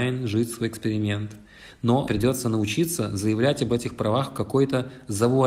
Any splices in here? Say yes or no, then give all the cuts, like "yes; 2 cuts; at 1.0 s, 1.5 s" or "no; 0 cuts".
yes; 1 cut; at 2.1 s